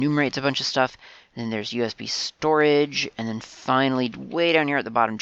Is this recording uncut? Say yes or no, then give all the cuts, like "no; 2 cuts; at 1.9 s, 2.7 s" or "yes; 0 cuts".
yes; 0 cuts